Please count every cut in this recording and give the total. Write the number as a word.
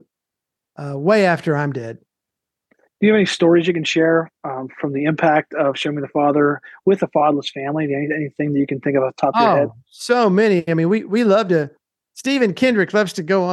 zero